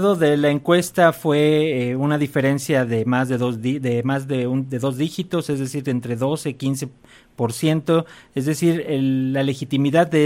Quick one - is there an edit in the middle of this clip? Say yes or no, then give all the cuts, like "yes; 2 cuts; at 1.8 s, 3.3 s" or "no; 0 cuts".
yes; 1 cut; at 8.8 s